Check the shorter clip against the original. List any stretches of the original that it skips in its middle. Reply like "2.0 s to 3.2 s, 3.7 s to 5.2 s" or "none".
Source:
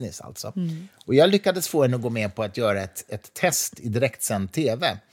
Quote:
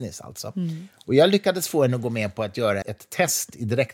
2.8 s to 3.1 s